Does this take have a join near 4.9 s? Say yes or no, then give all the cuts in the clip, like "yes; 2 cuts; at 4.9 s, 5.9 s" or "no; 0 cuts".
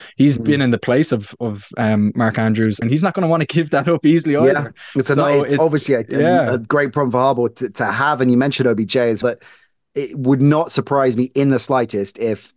no; 2 cuts; at 2.8 s, 9.2 s